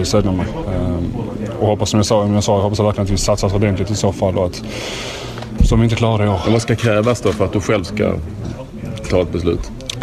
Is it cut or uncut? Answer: cut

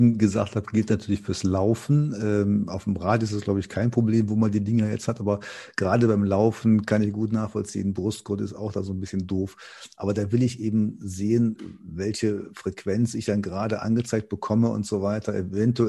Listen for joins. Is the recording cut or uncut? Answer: uncut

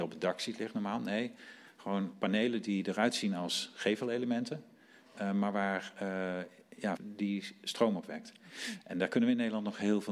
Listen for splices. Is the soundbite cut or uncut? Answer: cut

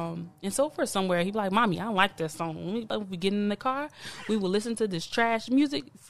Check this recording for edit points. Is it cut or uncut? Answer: cut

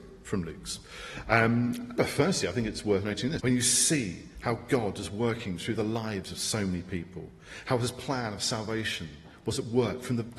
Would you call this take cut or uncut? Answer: cut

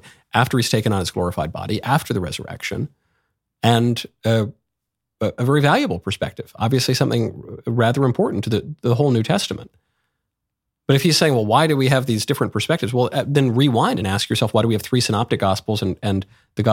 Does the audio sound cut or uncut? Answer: uncut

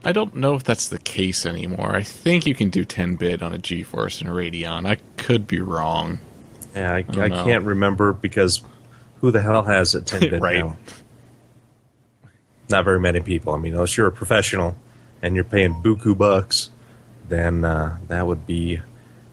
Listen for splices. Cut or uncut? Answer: uncut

